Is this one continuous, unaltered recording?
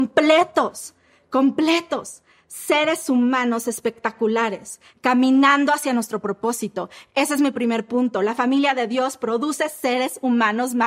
yes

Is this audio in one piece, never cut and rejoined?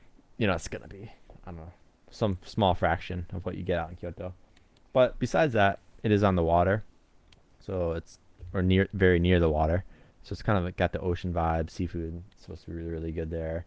yes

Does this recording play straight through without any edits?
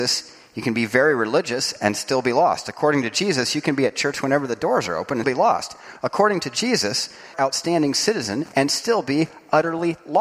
no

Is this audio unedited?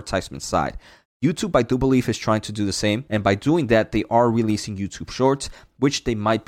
no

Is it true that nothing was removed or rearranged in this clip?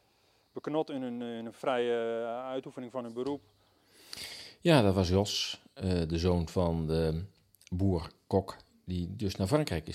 yes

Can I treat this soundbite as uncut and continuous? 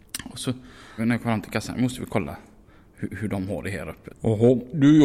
no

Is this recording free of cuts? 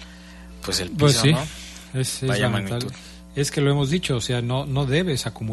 yes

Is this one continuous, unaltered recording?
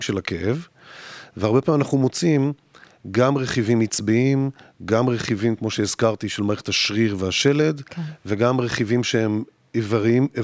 yes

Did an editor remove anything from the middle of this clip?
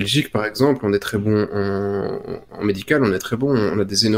no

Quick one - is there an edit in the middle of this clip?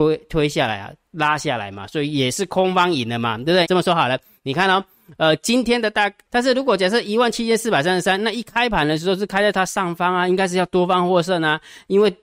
yes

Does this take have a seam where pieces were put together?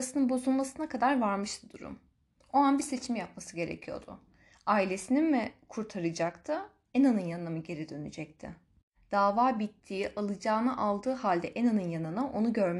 no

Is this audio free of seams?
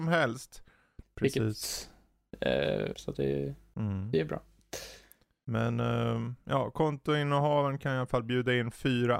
no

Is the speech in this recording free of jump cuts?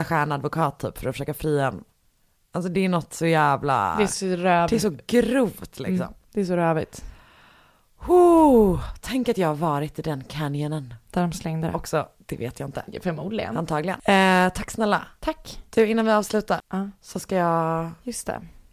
no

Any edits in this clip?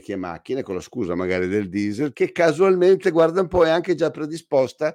yes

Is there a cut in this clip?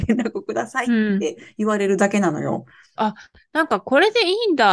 yes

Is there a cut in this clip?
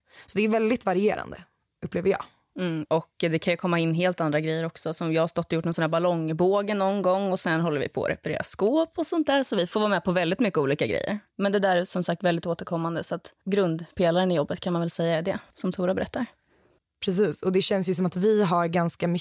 yes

